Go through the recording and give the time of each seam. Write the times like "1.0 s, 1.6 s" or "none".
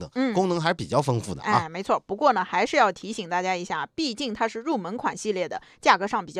none